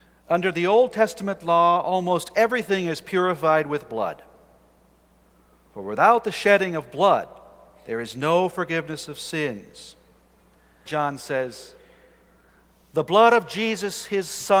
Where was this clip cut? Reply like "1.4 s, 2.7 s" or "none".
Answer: 10.9 s